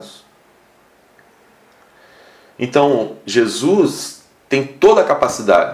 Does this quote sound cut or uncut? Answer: uncut